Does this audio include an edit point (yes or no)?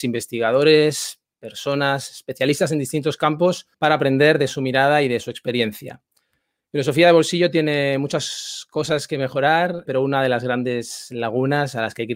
yes